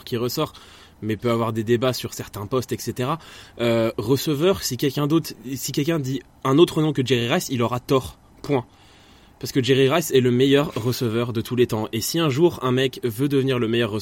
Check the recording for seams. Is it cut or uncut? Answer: uncut